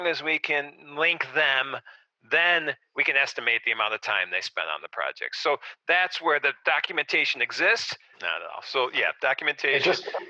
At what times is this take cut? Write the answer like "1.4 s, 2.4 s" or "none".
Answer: 8.1 s